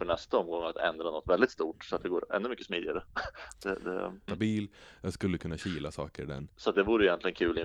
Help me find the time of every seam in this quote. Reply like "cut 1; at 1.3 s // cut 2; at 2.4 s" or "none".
cut 1; at 4.3 s // cut 2; at 6.5 s